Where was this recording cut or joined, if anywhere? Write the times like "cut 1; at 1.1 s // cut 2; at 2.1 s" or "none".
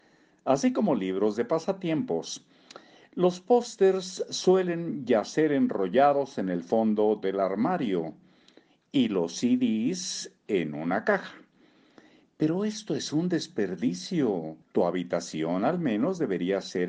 cut 1; at 14.6 s